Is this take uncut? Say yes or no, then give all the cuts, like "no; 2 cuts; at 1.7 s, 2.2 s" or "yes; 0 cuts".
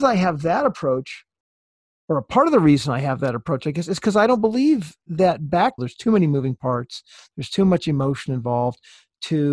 no; 1 cut; at 5.8 s